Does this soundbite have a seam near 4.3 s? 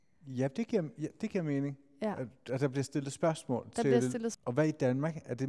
yes; 1 cut; at 4.3 s

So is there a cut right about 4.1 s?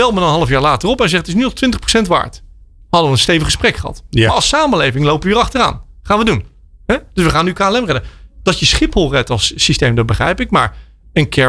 no; 0 cuts

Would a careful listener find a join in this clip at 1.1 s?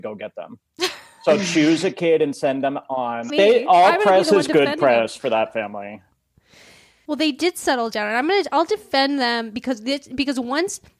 no; 2 cuts; at 3.3 s, 7.0 s

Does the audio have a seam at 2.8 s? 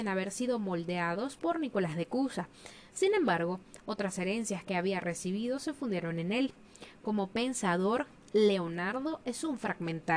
no; 0 cuts

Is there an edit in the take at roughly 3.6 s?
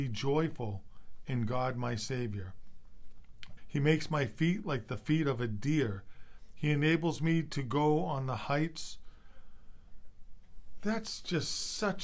yes; 1 cut; at 3.6 s

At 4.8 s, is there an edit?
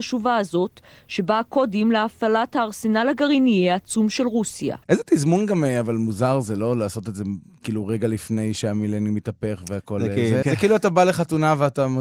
yes; 2 cuts; at 4.8 s, 10.4 s

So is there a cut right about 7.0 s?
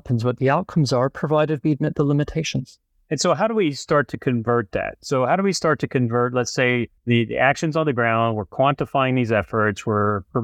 yes; 1 cut; at 7.0 s

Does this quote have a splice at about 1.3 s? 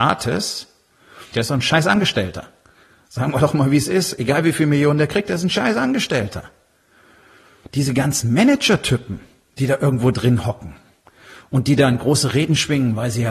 yes; 2 cuts; at 1.3 s, 7.7 s

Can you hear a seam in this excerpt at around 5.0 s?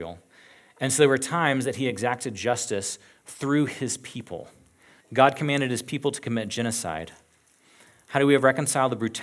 yes; 1 cut; at 5.0 s

